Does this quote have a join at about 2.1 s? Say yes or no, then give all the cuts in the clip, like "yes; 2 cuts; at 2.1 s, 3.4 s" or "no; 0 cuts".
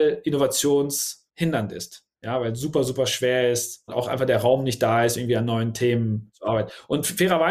no; 0 cuts